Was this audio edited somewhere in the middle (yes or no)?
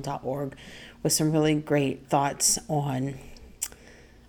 yes